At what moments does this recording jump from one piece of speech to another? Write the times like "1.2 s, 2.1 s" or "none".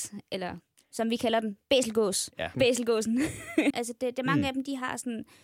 2.5 s, 3.7 s